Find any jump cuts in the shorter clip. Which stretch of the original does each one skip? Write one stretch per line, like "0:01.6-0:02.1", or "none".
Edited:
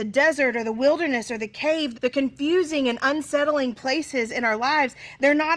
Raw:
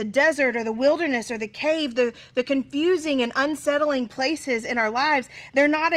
0:01.9-0:02.3